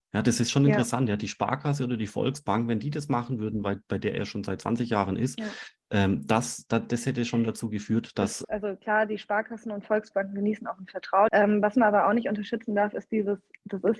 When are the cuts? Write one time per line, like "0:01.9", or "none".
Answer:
0:08.4
0:11.3